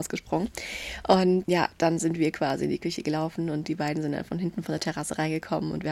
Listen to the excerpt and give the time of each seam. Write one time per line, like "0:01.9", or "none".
0:01.4